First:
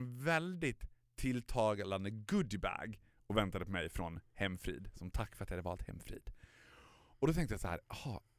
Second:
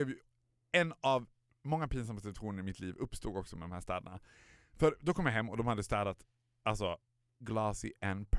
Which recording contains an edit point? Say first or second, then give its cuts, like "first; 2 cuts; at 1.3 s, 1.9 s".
second; 1 cut; at 7.4 s